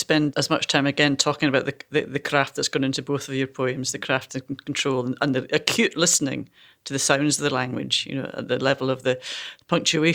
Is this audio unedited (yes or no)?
yes